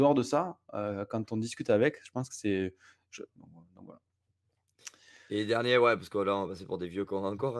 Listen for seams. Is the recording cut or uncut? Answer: cut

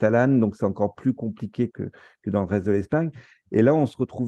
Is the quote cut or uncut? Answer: cut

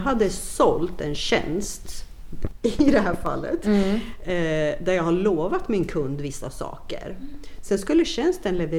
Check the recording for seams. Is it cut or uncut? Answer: uncut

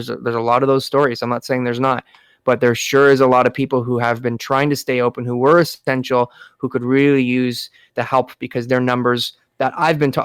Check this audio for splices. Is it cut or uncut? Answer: uncut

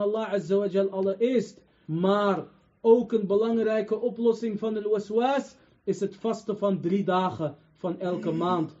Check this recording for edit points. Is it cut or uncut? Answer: cut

